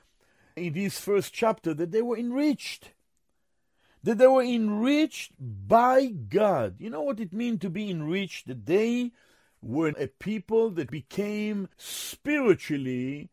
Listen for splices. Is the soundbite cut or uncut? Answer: cut